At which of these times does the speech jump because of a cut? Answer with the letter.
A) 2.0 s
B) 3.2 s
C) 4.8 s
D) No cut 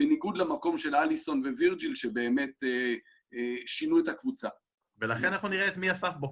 C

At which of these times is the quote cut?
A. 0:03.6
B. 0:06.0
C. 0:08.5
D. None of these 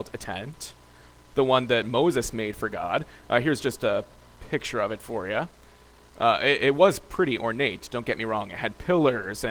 D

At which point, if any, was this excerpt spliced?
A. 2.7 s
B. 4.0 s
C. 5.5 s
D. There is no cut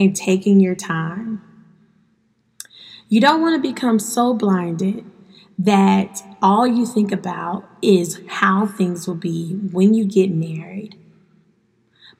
D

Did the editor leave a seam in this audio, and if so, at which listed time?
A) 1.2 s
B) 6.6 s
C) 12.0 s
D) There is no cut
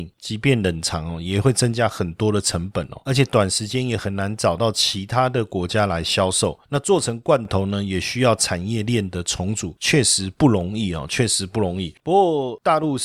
C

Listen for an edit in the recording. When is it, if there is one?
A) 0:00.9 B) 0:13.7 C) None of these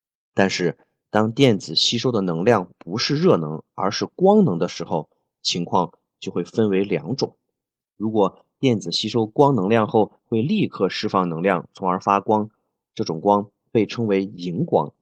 C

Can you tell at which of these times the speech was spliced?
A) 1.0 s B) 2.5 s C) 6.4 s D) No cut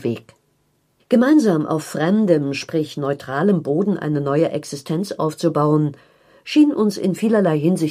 A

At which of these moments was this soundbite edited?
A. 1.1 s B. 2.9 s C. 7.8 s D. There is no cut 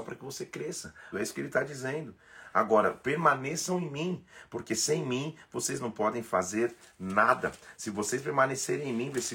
A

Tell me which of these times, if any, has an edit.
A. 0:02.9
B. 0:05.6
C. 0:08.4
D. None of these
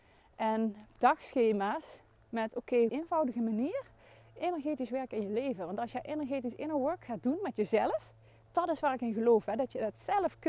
A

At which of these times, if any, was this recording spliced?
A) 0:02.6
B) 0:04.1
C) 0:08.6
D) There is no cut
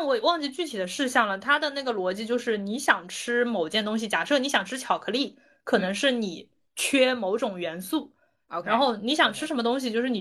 D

